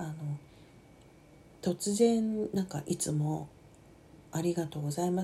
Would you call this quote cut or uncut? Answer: cut